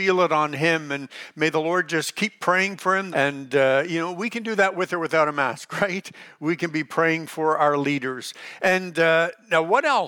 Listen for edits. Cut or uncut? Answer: cut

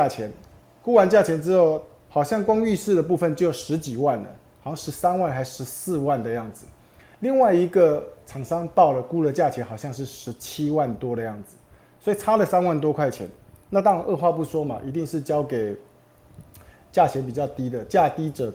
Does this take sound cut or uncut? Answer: uncut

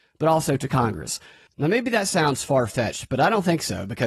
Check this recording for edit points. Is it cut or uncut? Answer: uncut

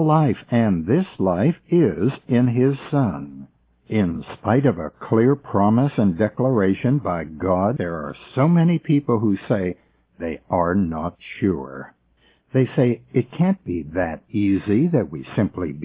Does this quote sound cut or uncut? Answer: cut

